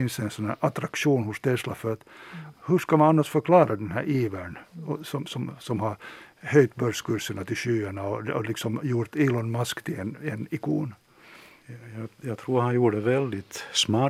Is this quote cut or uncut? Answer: uncut